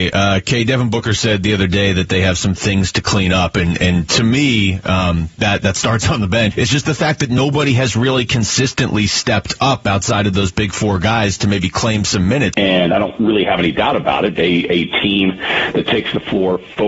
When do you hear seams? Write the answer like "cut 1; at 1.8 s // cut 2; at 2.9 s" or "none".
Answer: cut 1; at 6.5 s // cut 2; at 12.5 s // cut 3; at 14.4 s